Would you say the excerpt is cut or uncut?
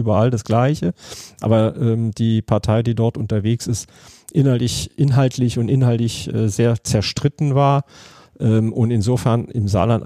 uncut